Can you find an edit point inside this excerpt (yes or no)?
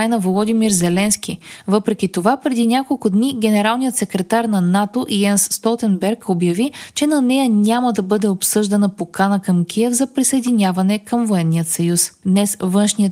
no